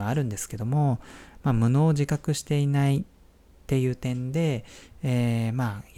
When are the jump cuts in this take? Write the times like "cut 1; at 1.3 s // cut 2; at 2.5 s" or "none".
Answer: none